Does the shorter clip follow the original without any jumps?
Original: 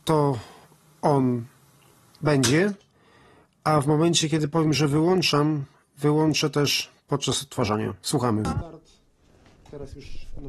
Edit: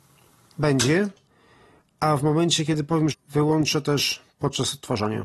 no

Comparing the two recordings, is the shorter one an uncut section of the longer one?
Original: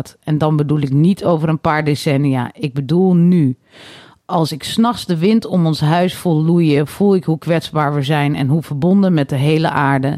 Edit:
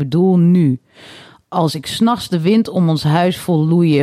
yes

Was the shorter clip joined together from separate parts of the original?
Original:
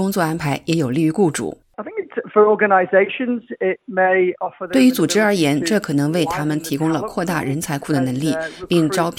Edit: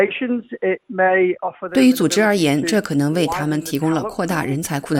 no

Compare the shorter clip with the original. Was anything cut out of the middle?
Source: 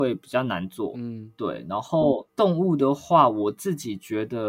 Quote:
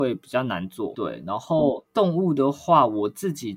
yes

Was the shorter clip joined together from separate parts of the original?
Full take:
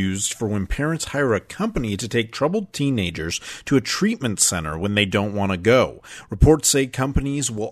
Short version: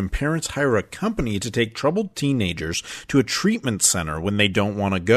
no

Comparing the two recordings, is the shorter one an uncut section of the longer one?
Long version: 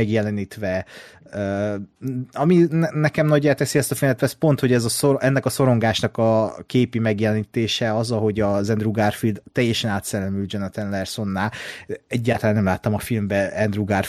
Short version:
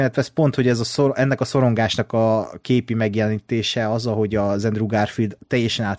yes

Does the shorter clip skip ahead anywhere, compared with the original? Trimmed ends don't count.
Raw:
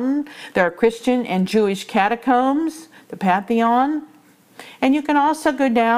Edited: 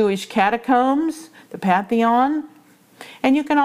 no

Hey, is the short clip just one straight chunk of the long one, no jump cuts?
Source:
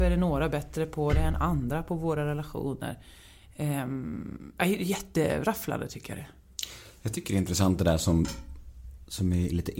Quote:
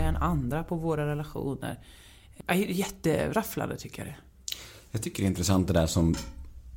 no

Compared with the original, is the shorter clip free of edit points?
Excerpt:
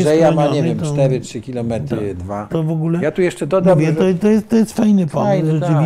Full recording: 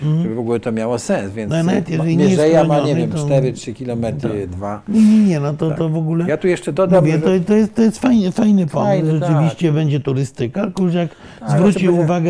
no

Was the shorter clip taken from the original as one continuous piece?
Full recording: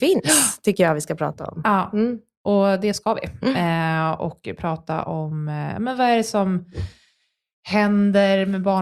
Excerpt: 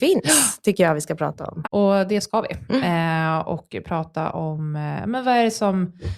no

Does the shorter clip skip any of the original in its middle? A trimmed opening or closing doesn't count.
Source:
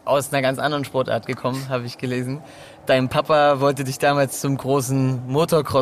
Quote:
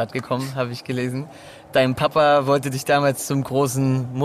no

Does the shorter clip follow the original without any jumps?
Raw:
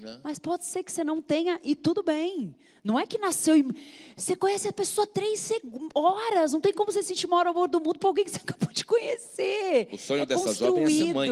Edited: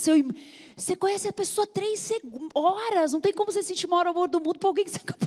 yes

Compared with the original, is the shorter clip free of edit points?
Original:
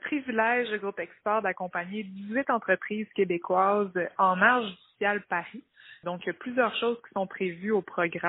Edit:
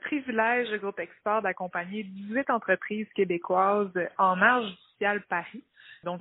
yes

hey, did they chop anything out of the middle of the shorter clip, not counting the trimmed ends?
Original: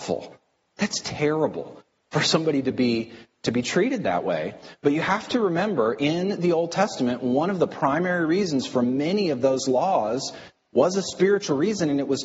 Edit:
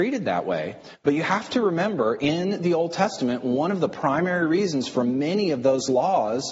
no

